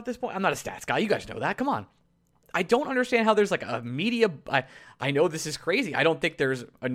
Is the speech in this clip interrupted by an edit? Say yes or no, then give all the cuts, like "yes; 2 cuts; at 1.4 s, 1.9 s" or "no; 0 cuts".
yes; 1 cut; at 2.4 s